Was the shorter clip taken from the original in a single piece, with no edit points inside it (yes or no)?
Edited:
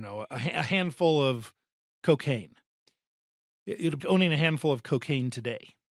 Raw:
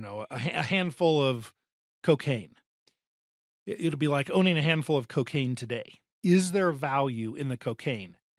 no